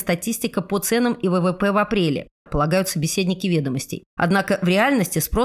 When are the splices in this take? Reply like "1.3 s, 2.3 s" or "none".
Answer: 2.5 s, 4.1 s